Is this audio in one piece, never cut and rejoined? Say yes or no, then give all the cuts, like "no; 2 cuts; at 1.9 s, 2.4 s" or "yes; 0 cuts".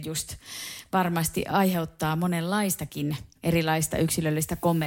no; 1 cut; at 3.4 s